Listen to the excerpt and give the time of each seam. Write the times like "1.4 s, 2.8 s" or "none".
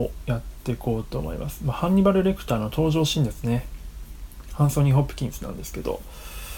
none